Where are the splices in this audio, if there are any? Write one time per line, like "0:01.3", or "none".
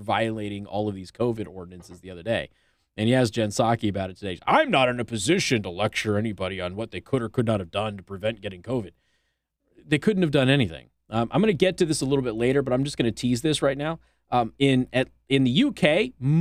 0:11.0

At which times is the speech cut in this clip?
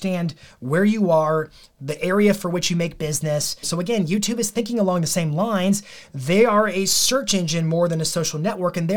0:03.6

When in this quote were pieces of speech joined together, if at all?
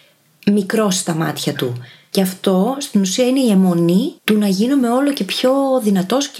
0:02.1
0:04.2

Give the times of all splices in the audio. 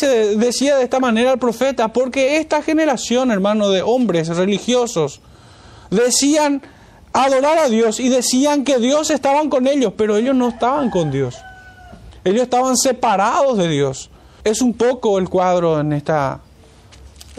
0:14.4

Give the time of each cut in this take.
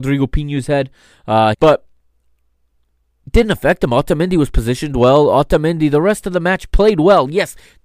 0:01.5

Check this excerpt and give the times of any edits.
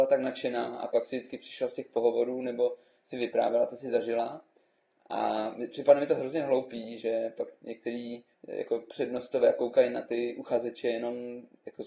0:08.3

